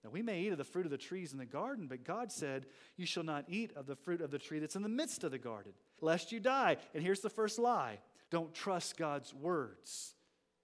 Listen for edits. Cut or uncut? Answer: cut